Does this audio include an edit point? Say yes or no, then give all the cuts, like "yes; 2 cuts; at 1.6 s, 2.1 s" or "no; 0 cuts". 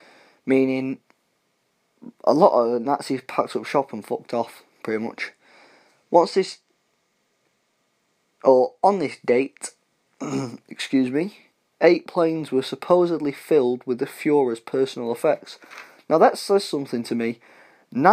no; 0 cuts